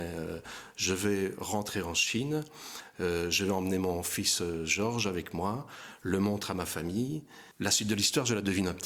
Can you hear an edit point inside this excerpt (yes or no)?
yes